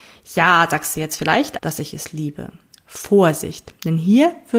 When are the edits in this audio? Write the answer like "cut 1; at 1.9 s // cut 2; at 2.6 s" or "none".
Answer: cut 1; at 1.6 s